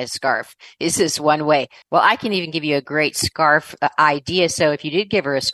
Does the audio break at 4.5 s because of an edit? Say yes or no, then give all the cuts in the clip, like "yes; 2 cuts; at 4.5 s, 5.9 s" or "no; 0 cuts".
no; 1 cut; at 1.8 s